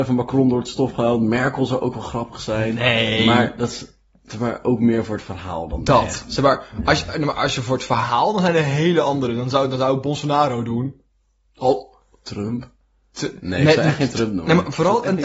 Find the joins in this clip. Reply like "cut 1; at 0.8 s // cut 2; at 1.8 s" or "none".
none